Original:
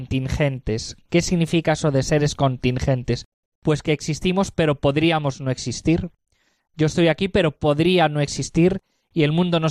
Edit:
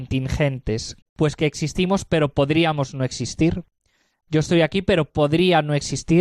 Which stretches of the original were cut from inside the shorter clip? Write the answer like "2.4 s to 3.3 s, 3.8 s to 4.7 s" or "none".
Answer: 1.0 s to 3.5 s